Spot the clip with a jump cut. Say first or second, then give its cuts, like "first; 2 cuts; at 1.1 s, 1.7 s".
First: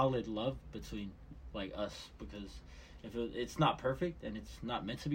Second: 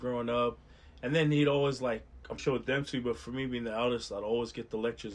second; 1 cut; at 2.4 s